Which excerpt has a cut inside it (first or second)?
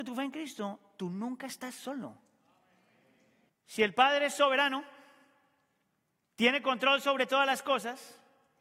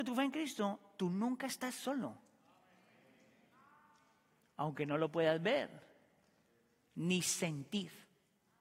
first